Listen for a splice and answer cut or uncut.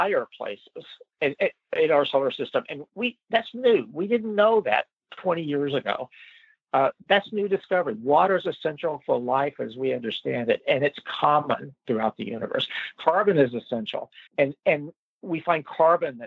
cut